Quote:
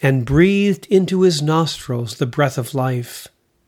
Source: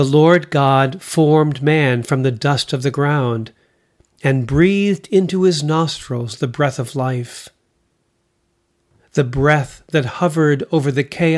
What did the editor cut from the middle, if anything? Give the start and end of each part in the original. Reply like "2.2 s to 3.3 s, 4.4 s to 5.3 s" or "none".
none